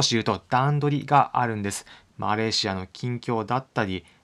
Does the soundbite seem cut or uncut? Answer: cut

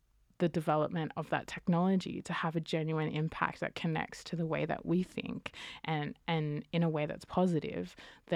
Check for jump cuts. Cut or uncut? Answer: uncut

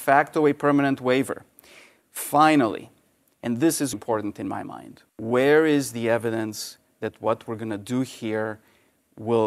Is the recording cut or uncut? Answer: cut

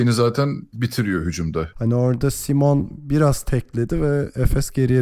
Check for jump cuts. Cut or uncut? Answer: cut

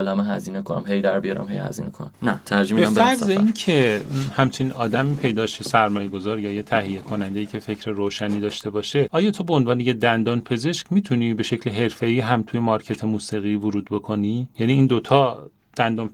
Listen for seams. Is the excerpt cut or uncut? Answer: uncut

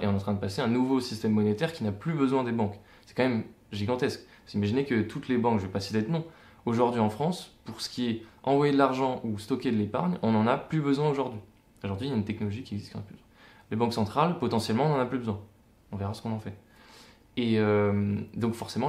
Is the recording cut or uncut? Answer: uncut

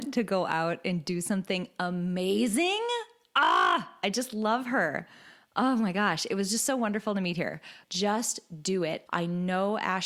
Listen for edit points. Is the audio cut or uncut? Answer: cut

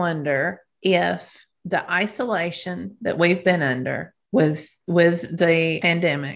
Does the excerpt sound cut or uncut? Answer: uncut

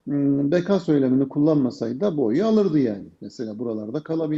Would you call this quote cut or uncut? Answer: uncut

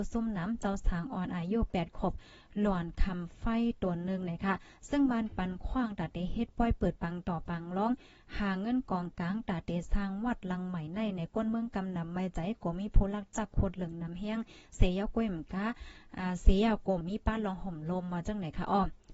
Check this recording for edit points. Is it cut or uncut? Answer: cut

